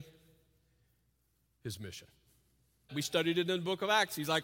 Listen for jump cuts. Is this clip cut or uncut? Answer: cut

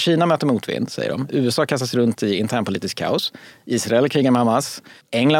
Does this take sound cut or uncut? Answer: uncut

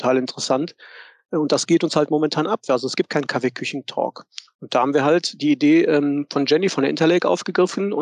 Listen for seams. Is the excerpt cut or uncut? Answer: uncut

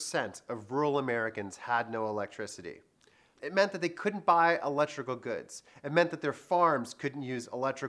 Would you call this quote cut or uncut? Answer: cut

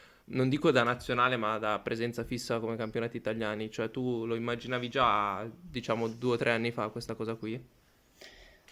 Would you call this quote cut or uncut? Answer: uncut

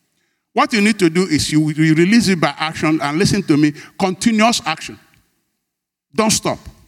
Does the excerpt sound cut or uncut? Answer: uncut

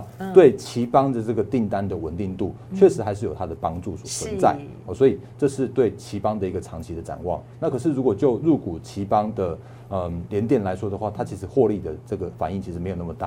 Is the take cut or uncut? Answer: uncut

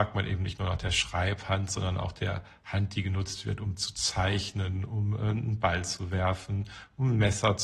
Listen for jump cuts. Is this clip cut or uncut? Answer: uncut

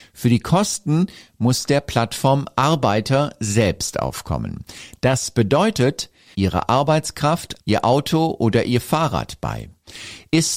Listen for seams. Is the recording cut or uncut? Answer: cut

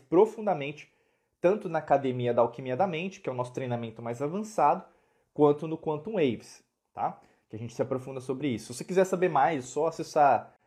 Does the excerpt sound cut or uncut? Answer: uncut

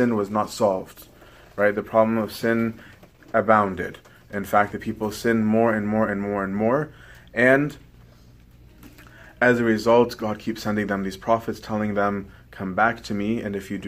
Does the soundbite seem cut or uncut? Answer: uncut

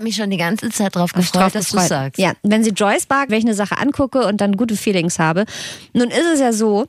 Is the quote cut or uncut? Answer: cut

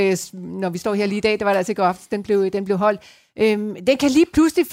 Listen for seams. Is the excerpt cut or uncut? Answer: uncut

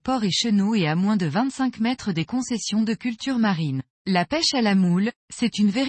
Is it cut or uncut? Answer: cut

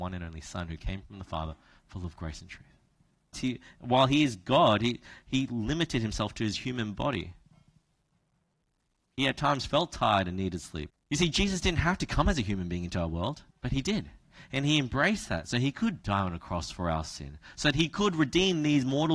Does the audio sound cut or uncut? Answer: cut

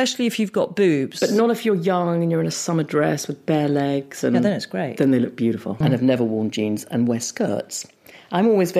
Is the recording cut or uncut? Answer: cut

